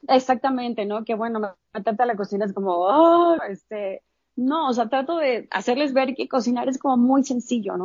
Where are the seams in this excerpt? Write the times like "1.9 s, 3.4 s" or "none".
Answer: 3.4 s